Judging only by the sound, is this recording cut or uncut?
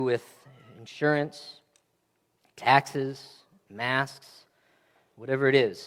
uncut